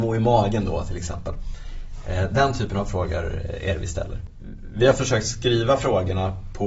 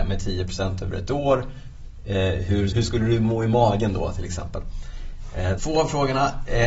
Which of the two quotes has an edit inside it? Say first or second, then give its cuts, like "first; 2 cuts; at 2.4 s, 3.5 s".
second; 2 cuts; at 2.7 s, 5.6 s